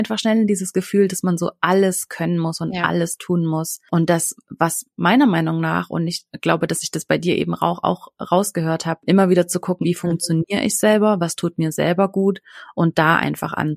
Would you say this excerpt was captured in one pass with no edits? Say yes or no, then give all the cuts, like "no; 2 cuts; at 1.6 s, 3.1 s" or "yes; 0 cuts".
no; 1 cut; at 9.8 s